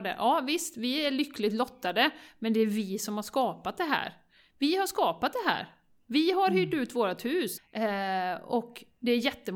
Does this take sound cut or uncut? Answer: cut